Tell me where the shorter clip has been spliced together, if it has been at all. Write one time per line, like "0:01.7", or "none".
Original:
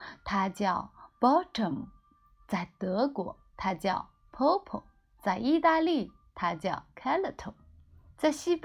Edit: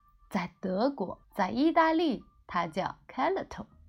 0:01.2